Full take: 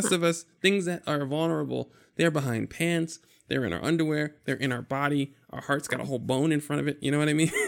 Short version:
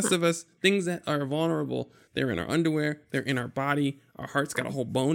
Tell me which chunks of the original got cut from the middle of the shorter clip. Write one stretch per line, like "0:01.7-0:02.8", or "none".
0:02.1-0:03.4